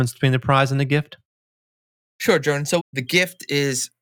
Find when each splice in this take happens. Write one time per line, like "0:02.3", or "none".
0:02.8